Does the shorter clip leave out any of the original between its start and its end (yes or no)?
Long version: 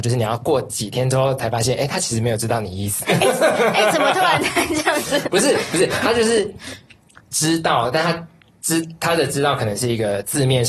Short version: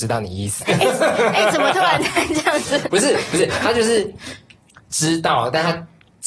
no